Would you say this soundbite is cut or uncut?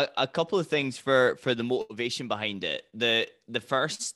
uncut